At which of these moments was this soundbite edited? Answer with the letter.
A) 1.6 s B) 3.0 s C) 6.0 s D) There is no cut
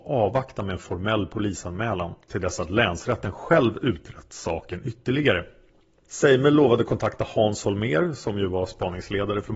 C